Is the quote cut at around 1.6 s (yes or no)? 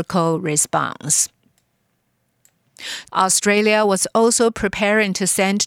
no